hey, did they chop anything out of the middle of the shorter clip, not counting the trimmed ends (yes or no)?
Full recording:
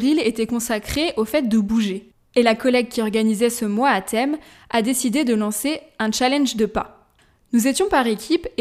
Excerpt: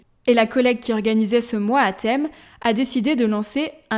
no